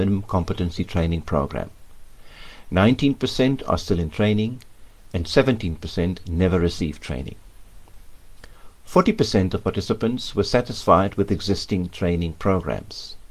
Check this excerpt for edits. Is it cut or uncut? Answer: uncut